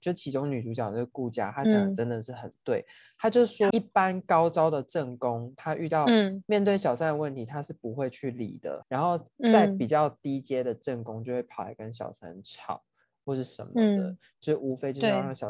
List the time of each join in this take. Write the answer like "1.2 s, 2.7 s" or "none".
3.7 s, 8.8 s